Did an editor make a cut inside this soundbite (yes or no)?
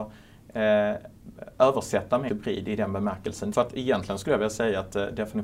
yes